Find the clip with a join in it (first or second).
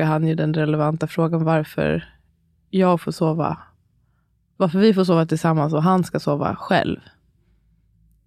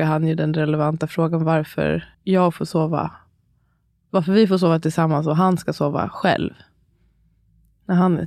second